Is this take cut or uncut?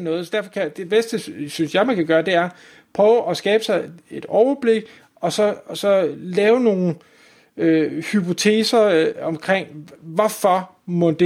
uncut